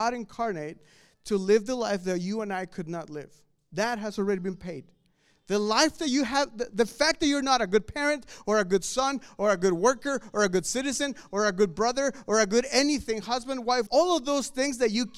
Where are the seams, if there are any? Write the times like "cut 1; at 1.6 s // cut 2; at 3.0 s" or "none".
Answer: cut 1; at 13.9 s